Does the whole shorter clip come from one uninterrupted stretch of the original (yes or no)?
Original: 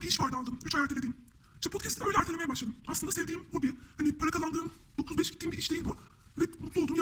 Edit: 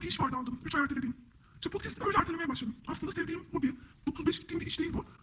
no